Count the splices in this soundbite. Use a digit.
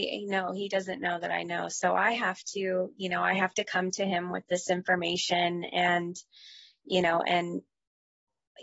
0